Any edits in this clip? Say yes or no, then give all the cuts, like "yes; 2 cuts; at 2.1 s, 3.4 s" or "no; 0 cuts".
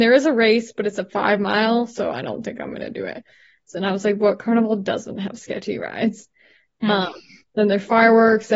yes; 1 cut; at 3.7 s